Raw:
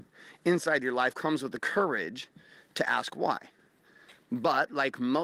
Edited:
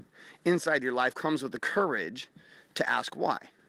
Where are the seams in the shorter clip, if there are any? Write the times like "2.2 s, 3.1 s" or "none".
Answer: none